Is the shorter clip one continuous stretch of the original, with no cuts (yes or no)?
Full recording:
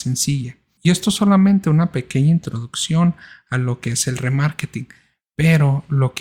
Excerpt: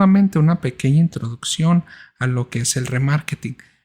yes